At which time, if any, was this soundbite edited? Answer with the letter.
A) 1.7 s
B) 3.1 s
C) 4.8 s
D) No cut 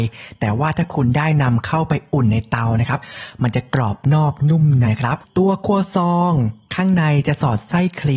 C